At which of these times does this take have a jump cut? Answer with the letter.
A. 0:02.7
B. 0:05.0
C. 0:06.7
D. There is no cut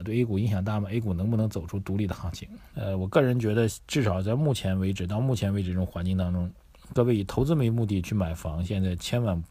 A